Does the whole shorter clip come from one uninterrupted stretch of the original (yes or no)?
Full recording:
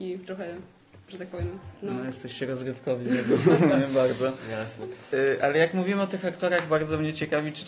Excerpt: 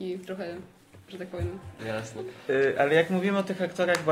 no